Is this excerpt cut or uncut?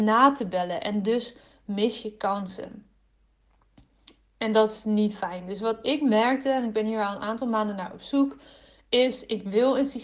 uncut